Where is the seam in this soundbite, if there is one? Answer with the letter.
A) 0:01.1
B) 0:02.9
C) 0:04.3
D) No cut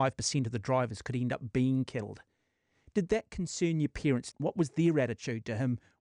C